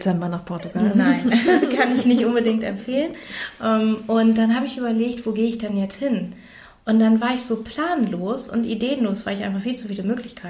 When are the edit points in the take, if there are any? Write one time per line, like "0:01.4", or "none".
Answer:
none